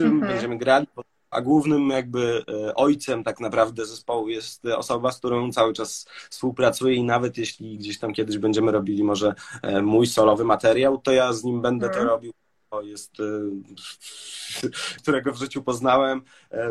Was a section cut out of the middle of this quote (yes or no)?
yes